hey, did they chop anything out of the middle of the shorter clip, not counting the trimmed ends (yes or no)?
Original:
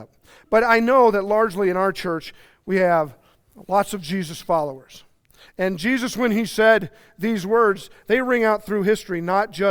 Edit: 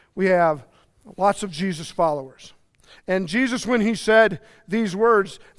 no